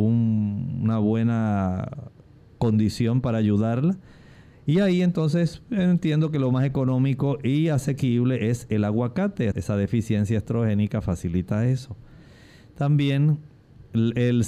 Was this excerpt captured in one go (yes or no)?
no